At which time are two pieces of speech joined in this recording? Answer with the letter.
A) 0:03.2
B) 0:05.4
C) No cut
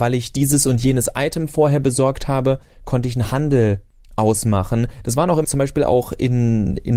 B